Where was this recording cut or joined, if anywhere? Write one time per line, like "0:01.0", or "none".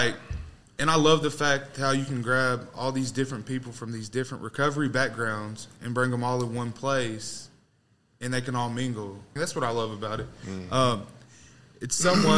0:09.4